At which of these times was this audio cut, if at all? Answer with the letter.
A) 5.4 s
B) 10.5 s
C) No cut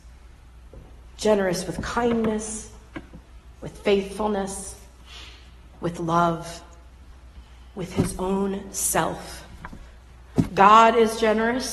B